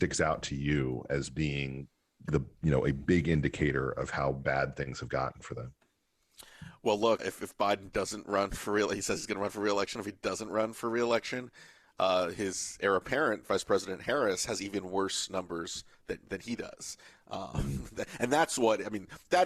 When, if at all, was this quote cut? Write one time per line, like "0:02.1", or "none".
0:07.2